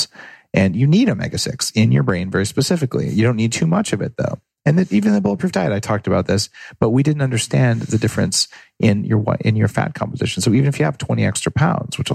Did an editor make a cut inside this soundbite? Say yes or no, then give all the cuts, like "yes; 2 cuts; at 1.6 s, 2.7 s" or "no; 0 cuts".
no; 0 cuts